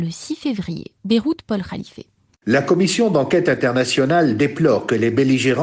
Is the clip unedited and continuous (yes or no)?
yes